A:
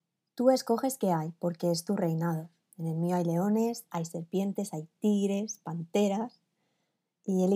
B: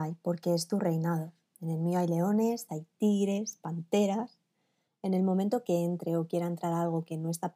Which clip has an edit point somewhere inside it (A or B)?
B